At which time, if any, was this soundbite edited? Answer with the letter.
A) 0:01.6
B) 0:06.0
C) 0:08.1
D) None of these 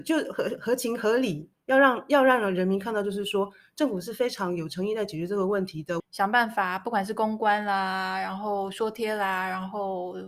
B